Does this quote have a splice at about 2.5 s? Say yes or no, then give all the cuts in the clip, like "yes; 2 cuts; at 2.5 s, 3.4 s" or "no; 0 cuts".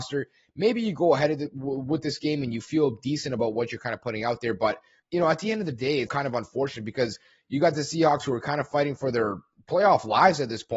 no; 2 cuts; at 5.0 s, 6.1 s